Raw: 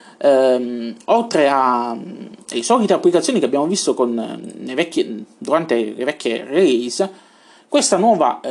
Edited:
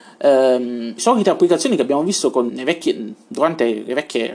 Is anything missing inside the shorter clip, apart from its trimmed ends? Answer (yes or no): yes